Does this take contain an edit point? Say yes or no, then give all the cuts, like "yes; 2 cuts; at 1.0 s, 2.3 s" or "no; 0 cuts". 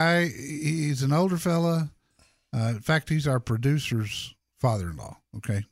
no; 0 cuts